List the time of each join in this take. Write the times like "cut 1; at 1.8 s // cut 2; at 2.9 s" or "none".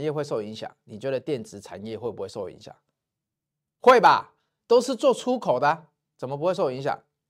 none